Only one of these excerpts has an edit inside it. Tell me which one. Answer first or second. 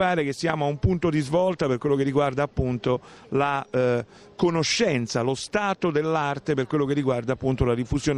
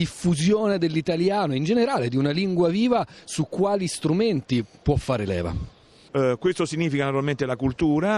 second